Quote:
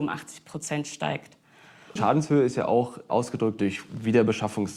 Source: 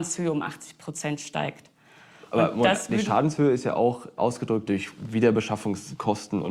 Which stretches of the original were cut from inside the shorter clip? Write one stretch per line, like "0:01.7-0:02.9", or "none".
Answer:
0:02.3-0:03.0